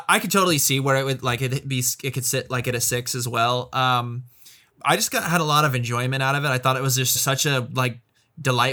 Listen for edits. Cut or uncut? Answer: cut